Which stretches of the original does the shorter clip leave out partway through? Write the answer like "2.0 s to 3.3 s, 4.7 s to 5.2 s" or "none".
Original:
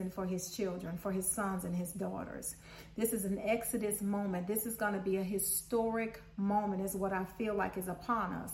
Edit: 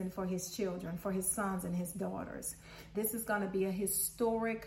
2.9 s to 4.5 s

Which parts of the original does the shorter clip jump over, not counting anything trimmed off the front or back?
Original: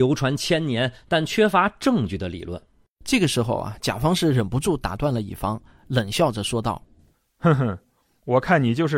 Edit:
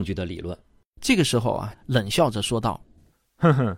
3.8 s to 5.8 s

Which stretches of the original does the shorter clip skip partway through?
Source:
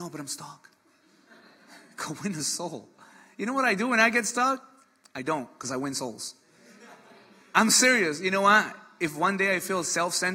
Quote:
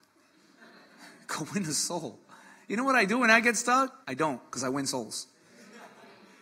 4.7 s to 5.1 s

